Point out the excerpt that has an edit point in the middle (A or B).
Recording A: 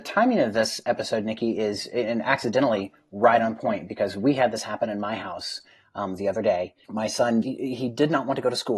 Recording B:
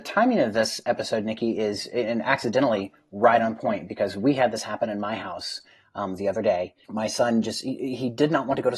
A